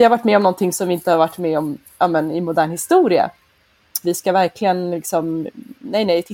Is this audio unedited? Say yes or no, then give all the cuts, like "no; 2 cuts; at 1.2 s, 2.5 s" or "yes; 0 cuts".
no; 1 cut; at 4.0 s